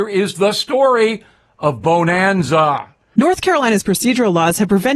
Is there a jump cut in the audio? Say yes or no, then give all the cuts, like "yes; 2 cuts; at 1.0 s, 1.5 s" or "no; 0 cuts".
yes; 1 cut; at 3.1 s